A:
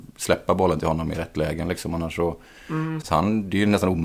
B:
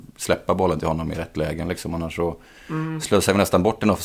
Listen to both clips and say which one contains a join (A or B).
A